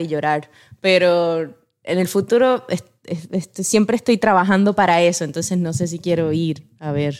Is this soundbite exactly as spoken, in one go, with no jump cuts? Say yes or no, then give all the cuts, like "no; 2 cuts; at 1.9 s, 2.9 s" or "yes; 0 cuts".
yes; 0 cuts